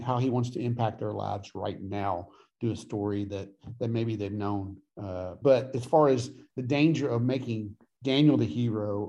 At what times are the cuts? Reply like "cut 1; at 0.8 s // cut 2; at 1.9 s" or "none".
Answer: cut 1; at 5.4 s